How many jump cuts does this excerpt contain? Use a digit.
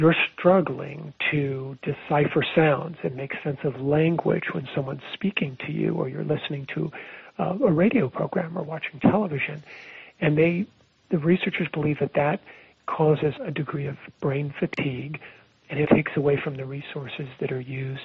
2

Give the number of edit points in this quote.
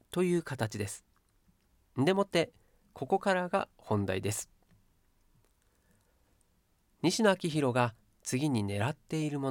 0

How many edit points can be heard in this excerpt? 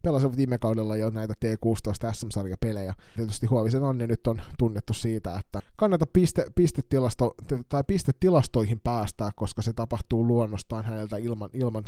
2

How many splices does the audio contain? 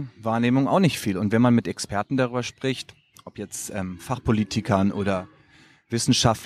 0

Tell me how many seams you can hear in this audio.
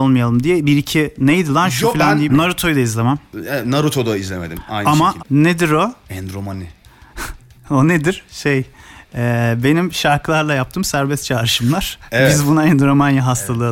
2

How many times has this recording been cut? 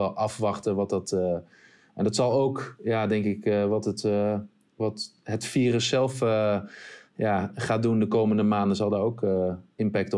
0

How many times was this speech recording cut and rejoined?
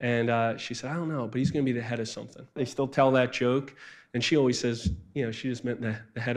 1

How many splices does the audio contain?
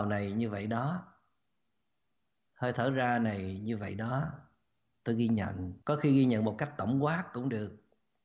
1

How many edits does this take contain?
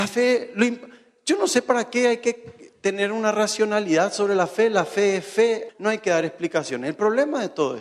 1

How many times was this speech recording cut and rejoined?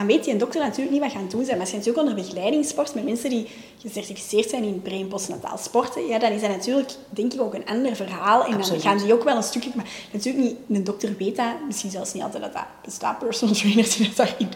0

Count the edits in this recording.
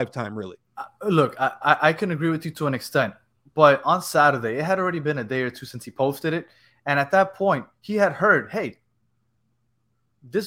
0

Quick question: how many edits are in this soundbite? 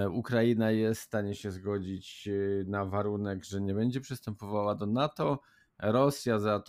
0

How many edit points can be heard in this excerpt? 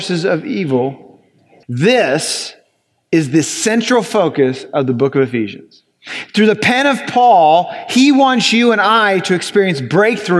1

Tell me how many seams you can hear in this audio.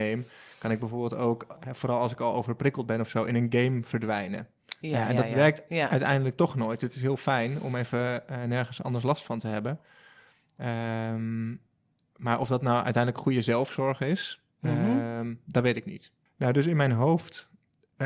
1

